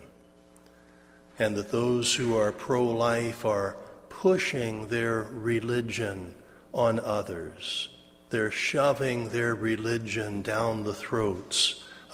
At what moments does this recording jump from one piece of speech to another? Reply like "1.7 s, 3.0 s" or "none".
none